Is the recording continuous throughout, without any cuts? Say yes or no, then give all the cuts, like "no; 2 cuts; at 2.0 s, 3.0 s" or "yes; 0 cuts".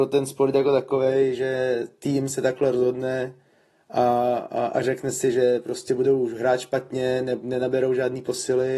yes; 0 cuts